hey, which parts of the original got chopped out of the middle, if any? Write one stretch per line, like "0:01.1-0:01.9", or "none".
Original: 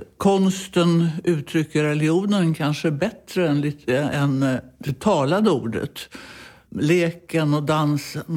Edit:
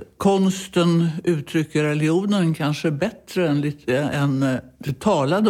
none